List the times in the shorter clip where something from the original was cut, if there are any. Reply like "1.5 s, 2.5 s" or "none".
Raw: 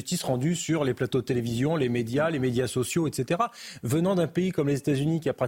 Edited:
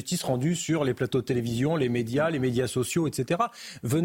none